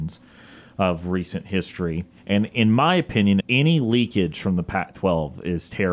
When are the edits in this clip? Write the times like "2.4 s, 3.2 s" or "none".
2.2 s, 3.4 s